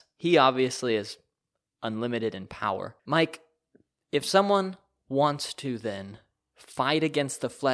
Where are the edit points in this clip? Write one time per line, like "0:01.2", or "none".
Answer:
0:03.0